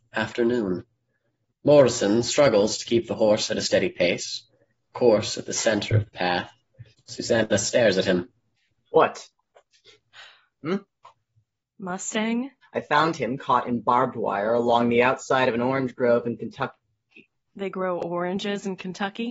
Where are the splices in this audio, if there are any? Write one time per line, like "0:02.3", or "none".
0:06.9
0:10.6
0:12.6